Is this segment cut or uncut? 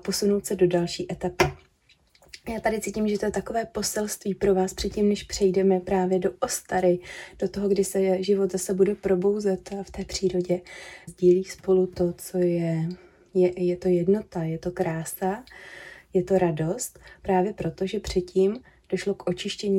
cut